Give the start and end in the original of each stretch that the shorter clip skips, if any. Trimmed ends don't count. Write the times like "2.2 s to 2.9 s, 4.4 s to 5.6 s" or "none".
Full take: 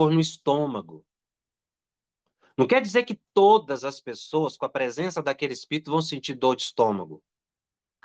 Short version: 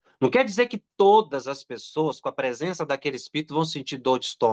none